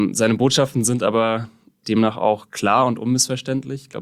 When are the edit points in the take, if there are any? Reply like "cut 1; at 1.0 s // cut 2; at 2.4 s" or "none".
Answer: none